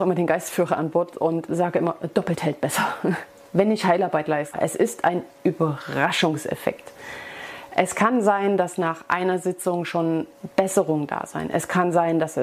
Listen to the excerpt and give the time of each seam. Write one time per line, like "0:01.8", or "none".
0:01.5
0:04.5

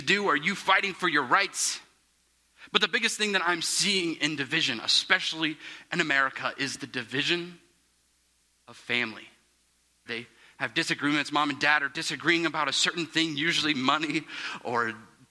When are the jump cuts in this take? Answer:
0:10.1

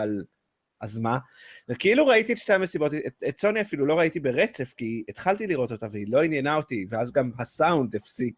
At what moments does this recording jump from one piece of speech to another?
none

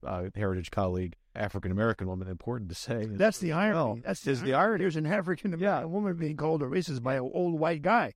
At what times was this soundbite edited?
0:01.4

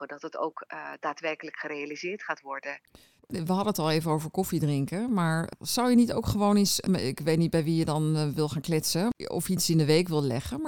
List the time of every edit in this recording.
none

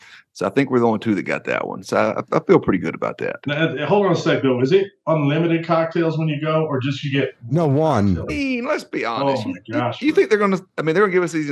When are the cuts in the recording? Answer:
0:08.3

